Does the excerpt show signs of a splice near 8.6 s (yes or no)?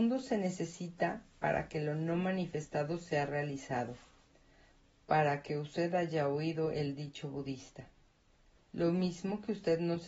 yes